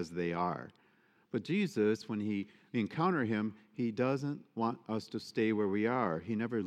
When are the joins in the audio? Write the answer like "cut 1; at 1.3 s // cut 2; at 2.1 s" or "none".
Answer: none